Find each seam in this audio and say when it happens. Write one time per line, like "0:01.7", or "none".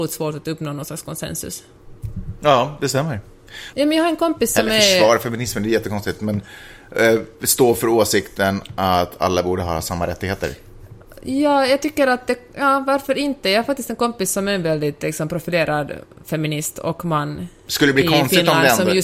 0:03.7